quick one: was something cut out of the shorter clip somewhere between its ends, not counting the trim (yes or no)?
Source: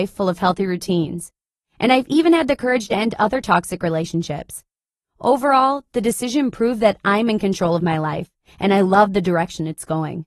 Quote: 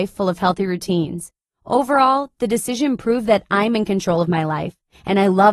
yes